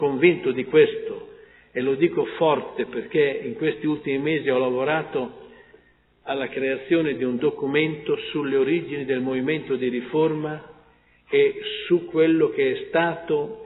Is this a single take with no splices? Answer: yes; 0 cuts

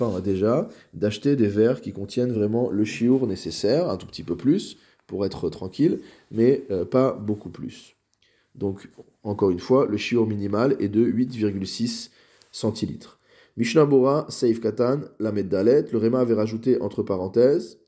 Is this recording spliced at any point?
no; 0 cuts

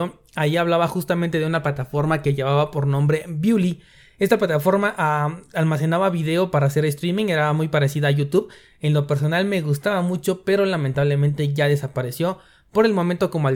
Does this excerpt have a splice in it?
no; 0 cuts

